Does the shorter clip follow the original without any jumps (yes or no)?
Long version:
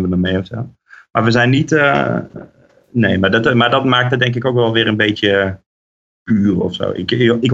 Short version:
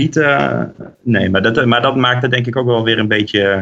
no